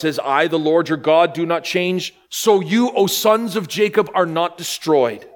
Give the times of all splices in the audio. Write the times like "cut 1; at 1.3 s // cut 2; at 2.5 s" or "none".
cut 1; at 2.2 s